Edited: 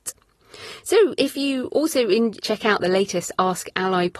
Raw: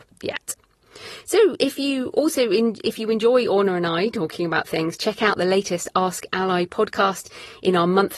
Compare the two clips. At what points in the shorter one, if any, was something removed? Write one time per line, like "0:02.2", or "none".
0:02.4